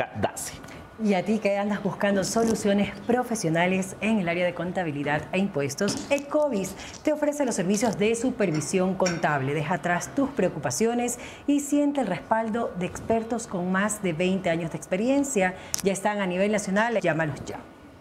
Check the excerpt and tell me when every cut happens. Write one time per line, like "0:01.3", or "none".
0:17.0